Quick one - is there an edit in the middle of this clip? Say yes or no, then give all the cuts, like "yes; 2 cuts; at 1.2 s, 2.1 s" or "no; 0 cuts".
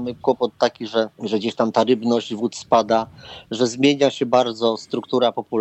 yes; 1 cut; at 1.1 s